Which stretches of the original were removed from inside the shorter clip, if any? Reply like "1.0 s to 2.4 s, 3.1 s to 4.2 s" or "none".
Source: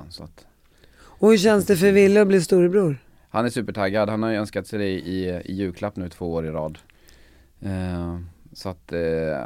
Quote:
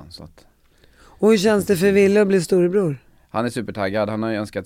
none